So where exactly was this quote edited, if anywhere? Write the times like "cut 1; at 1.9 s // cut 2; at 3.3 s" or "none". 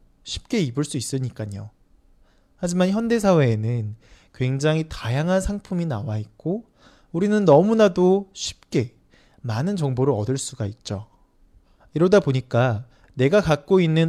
none